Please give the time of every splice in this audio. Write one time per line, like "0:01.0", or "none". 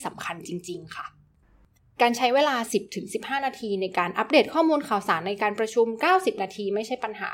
none